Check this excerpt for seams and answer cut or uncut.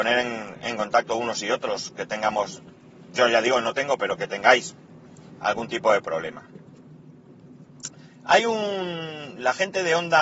cut